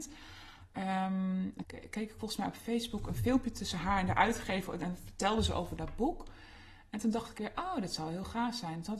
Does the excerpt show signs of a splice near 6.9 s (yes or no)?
no